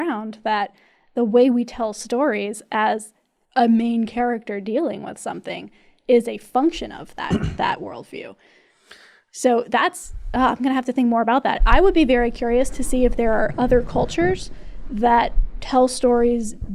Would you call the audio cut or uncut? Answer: uncut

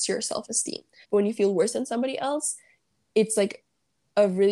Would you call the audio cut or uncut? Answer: cut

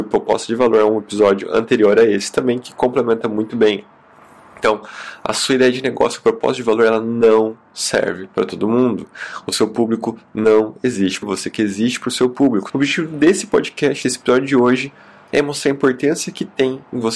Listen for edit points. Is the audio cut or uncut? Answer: cut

